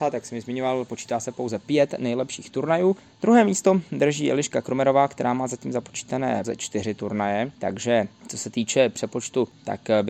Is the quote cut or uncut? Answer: cut